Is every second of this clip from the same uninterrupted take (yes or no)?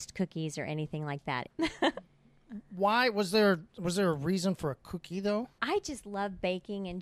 no